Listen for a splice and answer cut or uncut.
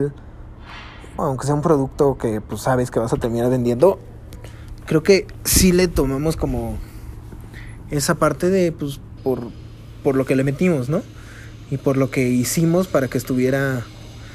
cut